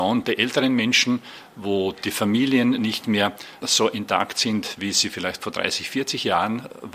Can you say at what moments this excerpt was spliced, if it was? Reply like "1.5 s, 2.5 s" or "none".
none

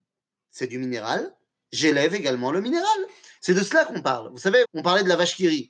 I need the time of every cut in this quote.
3.4 s, 4.6 s

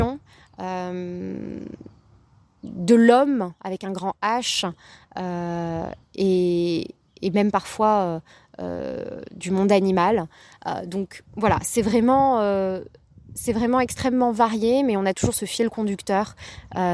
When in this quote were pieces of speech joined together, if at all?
none

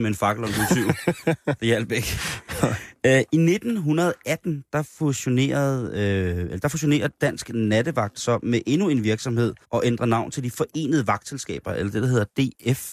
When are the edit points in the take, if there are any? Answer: 9.6 s

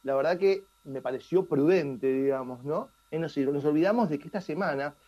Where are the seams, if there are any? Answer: 3.1 s

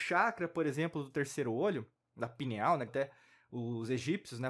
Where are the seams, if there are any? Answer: 2.9 s

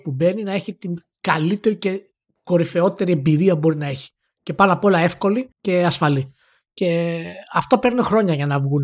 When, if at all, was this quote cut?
5.5 s

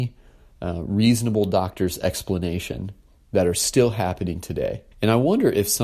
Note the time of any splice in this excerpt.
4.9 s

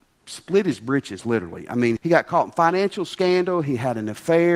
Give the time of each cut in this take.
2.0 s

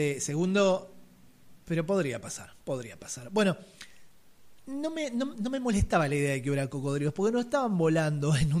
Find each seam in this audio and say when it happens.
4.6 s

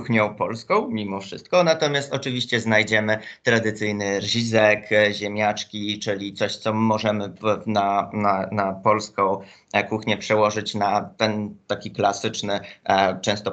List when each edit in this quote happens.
none

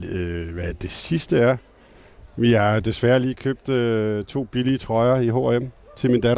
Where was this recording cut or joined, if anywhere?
none

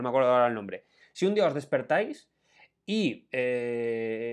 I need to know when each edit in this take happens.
1.0 s

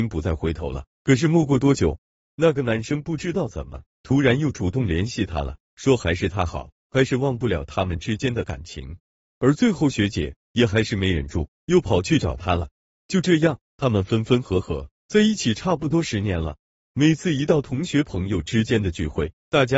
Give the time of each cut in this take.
none

